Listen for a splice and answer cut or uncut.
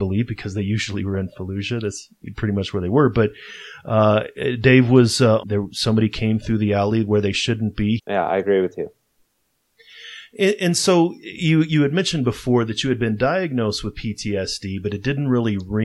cut